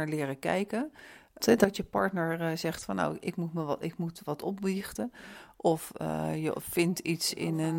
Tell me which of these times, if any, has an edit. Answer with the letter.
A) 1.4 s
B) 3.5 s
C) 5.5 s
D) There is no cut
A